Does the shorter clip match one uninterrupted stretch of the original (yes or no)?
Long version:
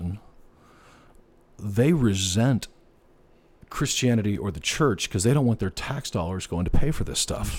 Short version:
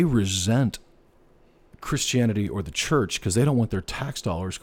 yes